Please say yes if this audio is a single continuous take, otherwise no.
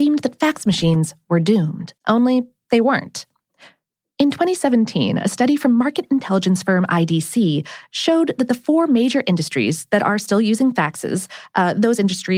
no